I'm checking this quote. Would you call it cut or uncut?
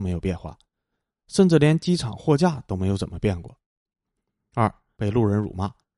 cut